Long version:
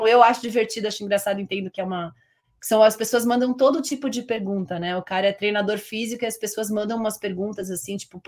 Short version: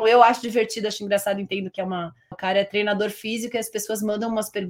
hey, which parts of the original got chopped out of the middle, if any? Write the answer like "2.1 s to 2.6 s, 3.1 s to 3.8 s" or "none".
2.3 s to 5.0 s